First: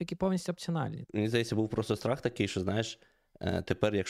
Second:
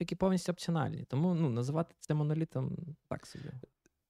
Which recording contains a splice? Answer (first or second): first